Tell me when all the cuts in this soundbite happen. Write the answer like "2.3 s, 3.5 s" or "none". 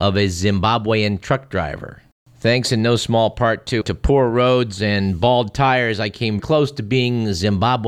3.8 s, 6.4 s